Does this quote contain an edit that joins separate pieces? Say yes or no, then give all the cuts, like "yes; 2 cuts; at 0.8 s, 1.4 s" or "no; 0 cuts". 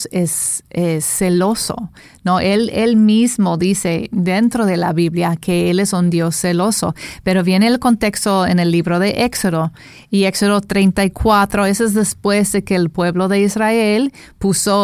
no; 0 cuts